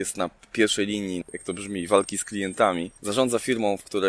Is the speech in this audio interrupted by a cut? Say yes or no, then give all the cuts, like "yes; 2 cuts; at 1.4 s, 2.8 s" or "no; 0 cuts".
yes; 1 cut; at 1.2 s